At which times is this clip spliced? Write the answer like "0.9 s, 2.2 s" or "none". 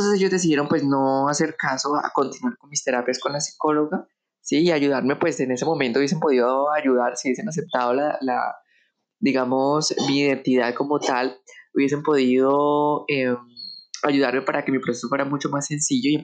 none